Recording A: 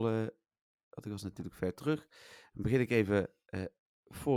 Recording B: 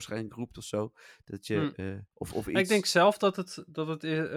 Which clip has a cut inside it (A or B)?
B